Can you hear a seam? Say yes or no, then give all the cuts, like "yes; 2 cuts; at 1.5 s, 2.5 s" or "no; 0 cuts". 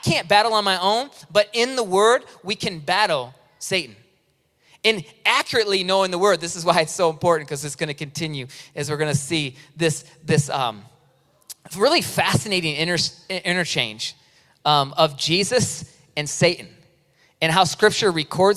no; 0 cuts